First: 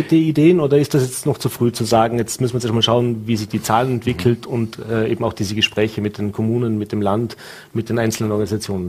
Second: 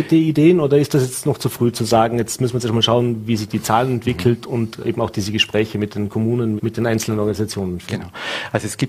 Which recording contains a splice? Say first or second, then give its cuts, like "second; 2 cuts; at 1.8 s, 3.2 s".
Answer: second; 2 cuts; at 4.8 s, 6.6 s